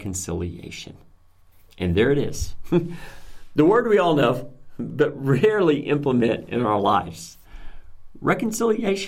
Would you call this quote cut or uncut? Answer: uncut